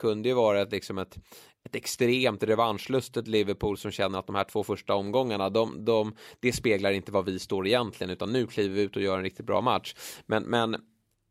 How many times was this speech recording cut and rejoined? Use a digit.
0